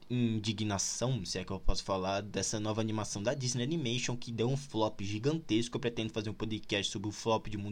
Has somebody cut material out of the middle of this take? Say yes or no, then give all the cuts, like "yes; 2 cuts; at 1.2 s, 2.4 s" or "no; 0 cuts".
no; 0 cuts